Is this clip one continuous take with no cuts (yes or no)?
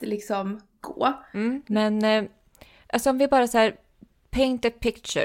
no